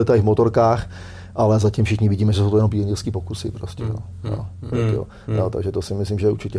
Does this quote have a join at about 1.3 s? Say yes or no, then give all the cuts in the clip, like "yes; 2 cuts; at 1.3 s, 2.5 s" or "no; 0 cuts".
no; 1 cut; at 4.7 s